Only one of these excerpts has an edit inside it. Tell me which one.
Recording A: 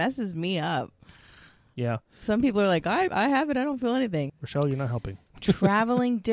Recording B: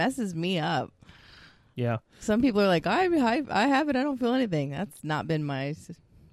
A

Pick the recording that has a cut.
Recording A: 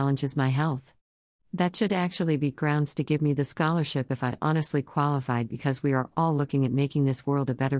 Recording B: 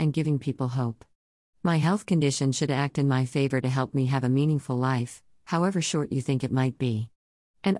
A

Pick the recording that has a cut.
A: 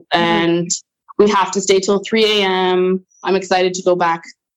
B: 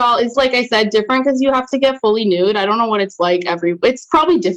A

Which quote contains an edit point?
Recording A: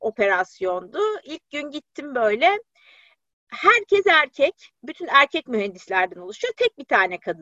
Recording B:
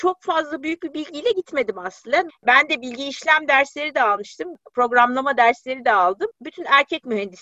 B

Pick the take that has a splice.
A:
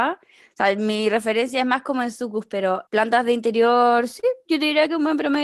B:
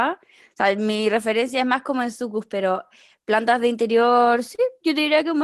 A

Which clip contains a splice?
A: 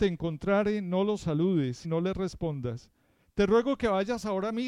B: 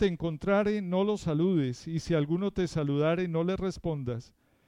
A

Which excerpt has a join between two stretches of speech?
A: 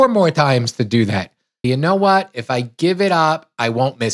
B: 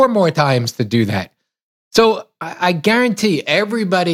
A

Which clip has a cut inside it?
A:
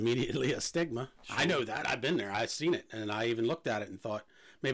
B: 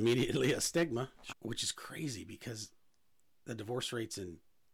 B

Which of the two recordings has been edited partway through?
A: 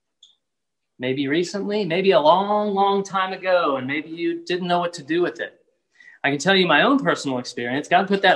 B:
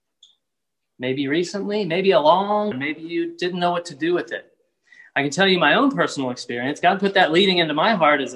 B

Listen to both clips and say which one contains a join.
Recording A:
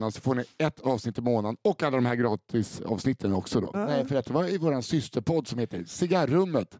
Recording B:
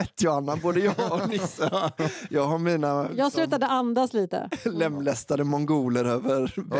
A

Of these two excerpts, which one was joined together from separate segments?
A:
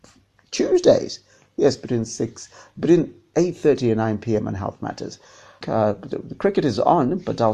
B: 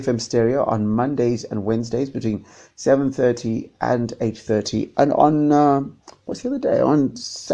A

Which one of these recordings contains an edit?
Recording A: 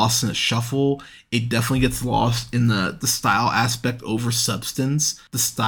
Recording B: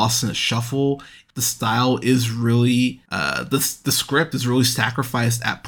B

